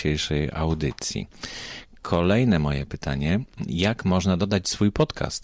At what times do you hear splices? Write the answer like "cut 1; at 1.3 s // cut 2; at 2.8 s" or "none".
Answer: none